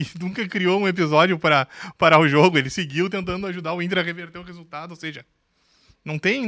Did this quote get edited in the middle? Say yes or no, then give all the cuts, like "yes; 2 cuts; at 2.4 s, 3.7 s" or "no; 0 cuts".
no; 0 cuts